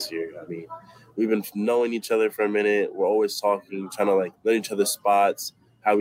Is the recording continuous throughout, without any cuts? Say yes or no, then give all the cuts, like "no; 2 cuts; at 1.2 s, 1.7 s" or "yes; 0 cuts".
no; 1 cut; at 4.3 s